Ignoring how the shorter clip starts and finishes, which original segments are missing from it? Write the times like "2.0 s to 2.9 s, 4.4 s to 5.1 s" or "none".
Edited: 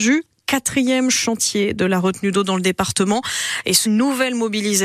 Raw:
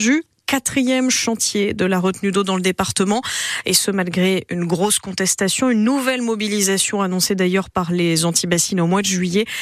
3.9 s to 5.7 s